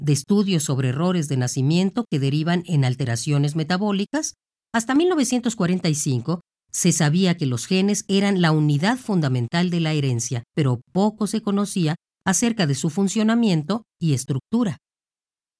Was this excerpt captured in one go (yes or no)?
no